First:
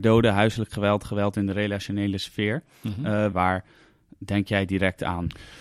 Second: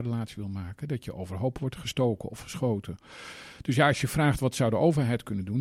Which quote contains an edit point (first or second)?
first